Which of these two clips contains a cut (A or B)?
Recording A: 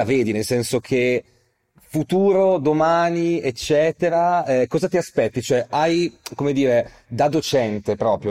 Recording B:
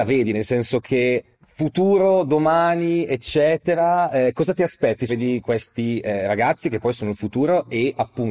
B